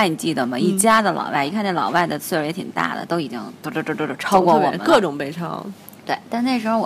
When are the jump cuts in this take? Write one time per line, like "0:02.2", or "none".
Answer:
none

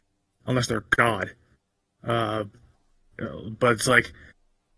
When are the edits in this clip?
none

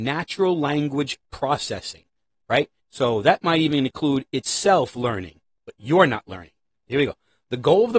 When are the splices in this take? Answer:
0:02.8

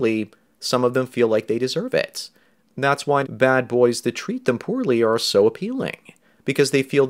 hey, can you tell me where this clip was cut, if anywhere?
0:03.2

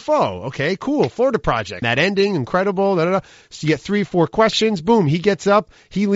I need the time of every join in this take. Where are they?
0:01.8

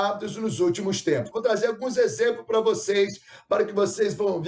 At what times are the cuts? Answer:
0:01.3

